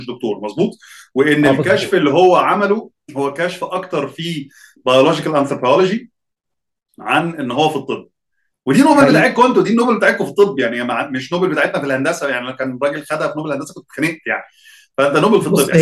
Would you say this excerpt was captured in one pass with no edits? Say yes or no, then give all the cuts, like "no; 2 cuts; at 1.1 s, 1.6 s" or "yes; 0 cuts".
yes; 0 cuts